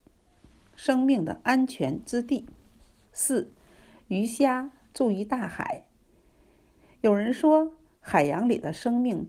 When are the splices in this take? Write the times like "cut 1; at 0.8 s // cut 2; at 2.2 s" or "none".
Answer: none